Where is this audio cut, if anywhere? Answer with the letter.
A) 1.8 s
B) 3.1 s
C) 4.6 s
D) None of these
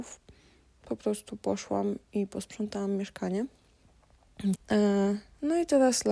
C